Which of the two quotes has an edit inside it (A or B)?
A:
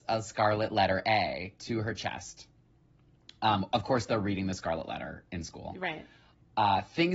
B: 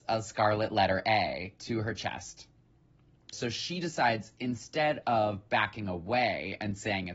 B